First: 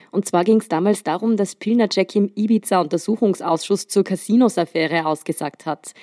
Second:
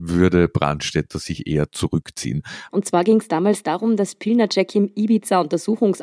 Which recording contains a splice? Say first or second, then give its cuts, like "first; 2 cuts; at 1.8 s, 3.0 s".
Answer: second; 1 cut; at 2.7 s